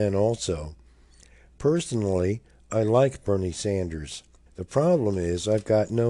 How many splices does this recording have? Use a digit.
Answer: 1